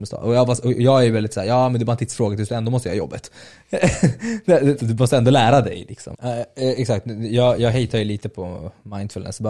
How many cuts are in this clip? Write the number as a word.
two